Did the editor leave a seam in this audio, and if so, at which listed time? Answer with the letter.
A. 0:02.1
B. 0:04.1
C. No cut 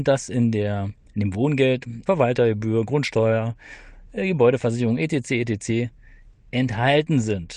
A